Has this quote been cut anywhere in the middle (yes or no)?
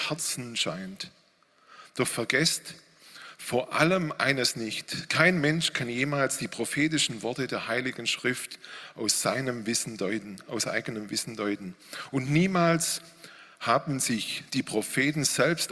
no